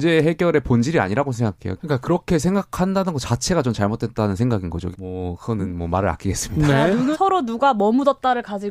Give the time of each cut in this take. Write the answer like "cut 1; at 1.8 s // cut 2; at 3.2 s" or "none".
cut 1; at 1.8 s // cut 2; at 4.9 s // cut 3; at 7.1 s